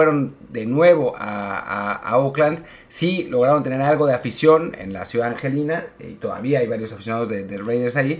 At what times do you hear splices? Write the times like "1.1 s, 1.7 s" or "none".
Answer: none